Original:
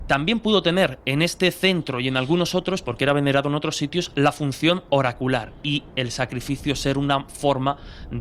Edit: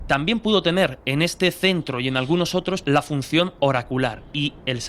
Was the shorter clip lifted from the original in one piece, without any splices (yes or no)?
no